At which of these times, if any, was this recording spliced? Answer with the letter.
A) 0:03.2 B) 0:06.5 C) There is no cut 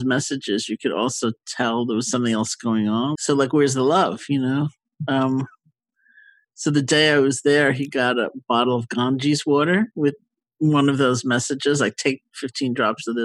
A